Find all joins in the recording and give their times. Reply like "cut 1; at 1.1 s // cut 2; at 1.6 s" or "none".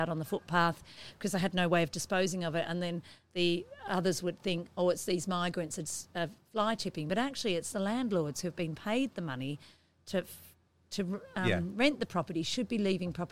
none